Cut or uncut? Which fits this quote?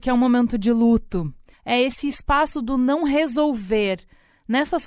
cut